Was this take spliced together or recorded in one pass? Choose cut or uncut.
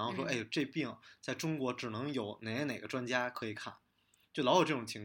uncut